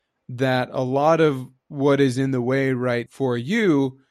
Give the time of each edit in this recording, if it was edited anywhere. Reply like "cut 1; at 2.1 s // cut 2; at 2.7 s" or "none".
cut 1; at 3.1 s

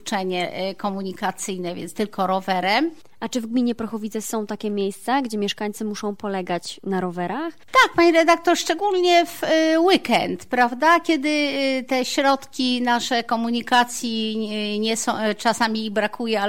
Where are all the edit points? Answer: none

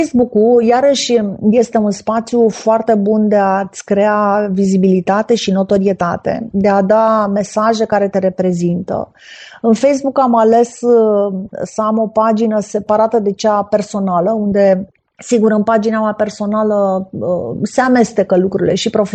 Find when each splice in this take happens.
none

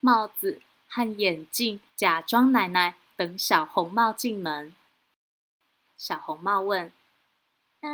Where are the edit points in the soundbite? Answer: cut 1; at 1.9 s // cut 2; at 5.8 s

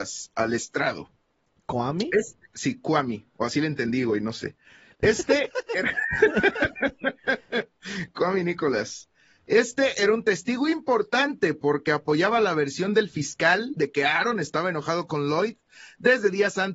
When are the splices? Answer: none

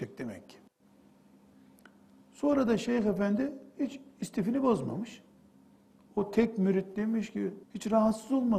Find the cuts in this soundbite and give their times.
cut 1; at 7.6 s

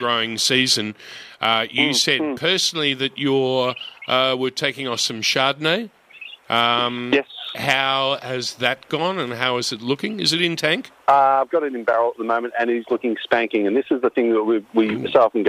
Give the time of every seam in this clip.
cut 1; at 11.0 s

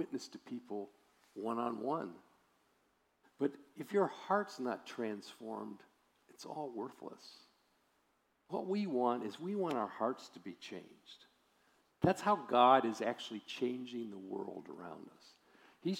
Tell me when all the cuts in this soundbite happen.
cut 1; at 3.2 s

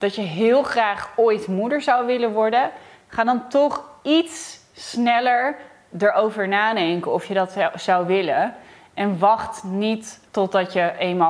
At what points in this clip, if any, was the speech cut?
cut 1; at 10.3 s

